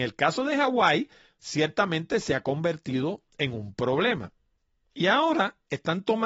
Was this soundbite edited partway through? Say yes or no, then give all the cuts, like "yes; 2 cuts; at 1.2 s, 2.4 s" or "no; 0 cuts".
no; 0 cuts